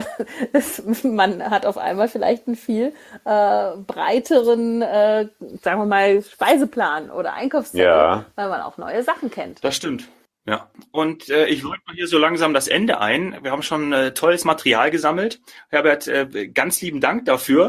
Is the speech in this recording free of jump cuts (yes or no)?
yes